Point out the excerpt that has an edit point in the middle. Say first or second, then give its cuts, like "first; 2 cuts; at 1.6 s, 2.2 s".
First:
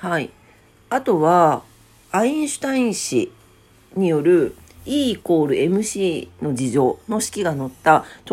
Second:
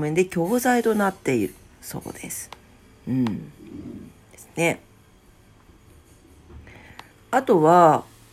second; 1 cut; at 7.1 s